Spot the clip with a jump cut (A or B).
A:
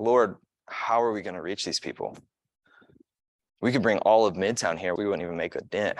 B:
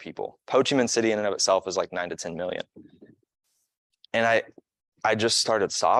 A